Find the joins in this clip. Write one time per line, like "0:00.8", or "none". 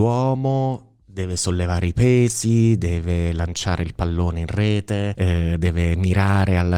none